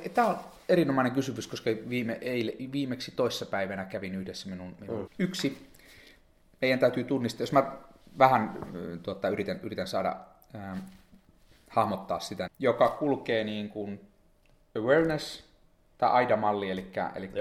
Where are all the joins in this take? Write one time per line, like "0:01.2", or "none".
0:05.1
0:12.5